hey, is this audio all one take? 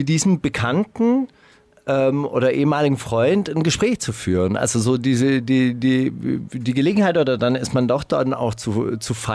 yes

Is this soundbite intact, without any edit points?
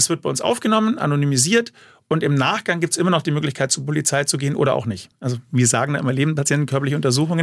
no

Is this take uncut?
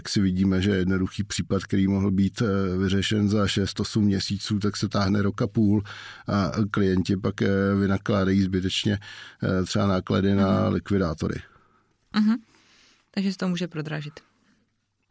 yes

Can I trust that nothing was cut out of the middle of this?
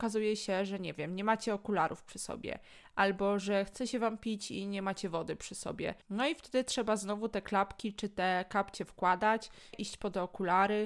no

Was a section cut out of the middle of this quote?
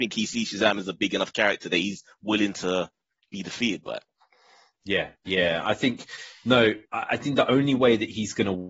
no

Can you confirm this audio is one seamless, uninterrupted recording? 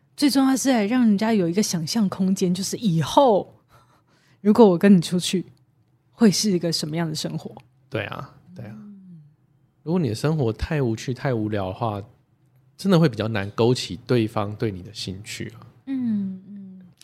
yes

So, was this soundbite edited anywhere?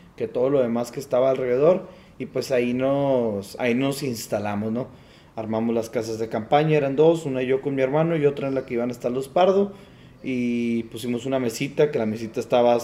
no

